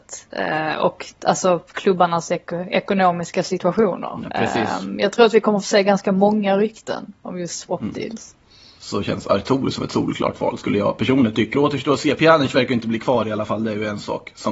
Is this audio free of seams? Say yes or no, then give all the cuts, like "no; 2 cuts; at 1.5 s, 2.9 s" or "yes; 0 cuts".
no; 2 cuts; at 8.8 s, 11.5 s